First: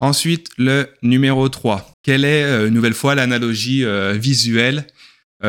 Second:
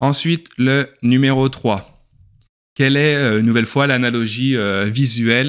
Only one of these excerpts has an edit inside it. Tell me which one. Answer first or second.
first